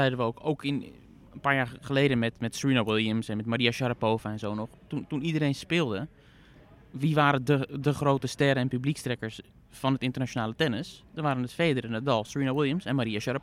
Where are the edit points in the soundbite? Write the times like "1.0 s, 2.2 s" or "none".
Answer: none